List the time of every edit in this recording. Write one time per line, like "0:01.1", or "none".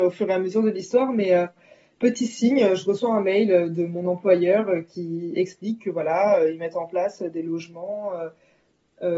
none

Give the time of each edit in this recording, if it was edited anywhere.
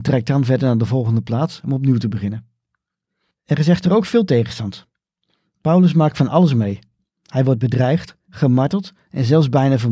0:08.3

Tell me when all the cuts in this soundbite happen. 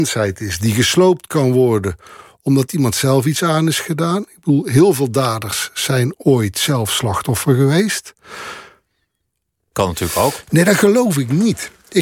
0:09.7

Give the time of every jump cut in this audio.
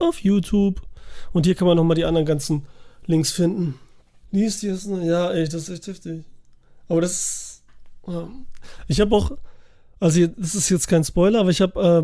0:04.2

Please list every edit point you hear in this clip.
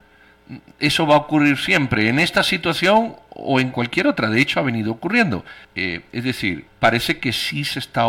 0:05.6
0:06.7

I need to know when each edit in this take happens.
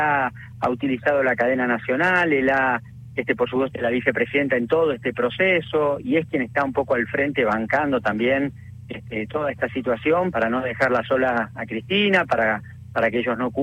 0:03.7
0:10.3

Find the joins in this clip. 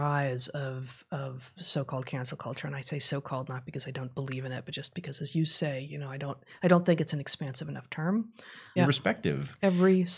0:08.8

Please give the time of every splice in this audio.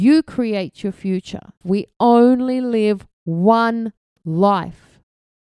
0:01.6

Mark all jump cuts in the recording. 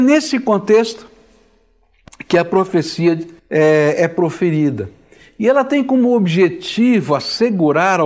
0:03.4

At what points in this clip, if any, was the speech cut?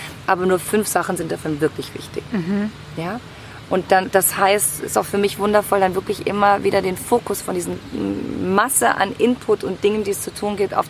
none

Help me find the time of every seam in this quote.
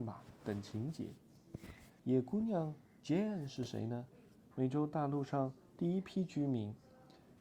0:02.0
0:04.5

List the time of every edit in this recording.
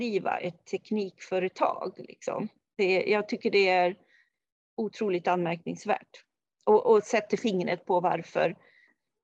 none

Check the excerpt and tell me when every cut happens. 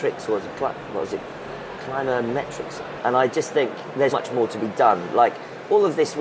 0:03.0
0:04.1

